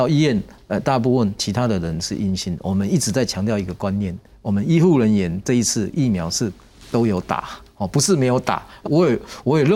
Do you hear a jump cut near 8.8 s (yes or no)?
yes